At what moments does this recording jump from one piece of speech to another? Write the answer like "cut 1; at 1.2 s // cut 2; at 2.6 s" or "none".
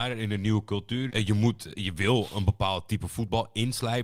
cut 1; at 1.1 s